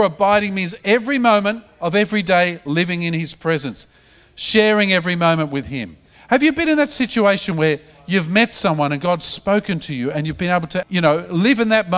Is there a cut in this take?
yes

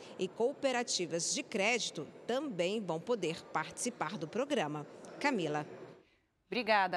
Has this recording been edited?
no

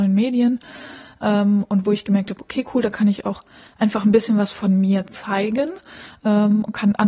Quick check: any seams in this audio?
no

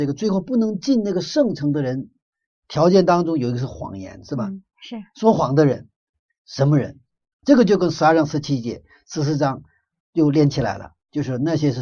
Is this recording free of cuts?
no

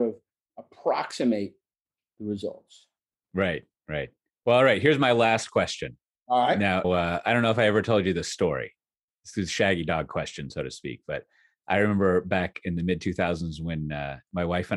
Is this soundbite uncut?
no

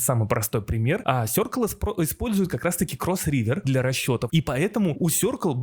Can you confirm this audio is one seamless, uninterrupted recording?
no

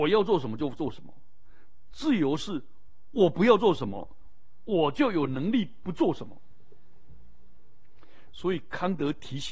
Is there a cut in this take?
no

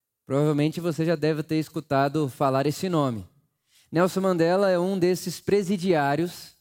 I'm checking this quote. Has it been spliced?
no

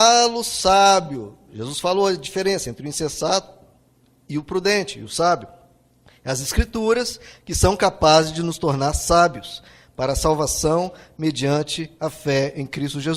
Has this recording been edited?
no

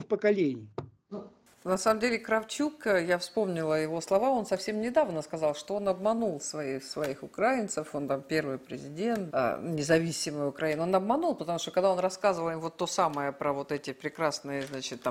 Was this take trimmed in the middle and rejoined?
yes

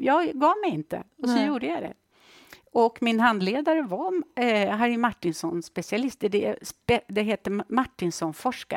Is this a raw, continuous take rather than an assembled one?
yes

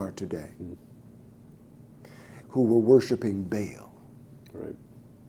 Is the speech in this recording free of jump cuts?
no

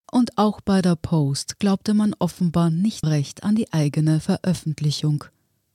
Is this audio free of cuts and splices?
no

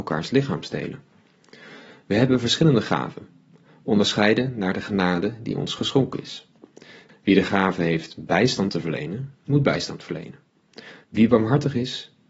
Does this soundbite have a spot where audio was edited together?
yes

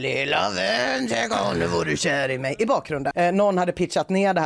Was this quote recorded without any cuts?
no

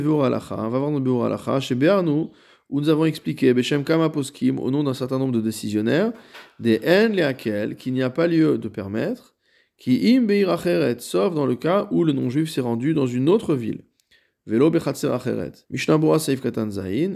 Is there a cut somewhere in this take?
yes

